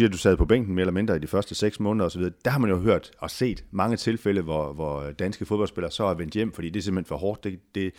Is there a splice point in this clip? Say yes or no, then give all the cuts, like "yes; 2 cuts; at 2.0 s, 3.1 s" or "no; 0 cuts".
no; 0 cuts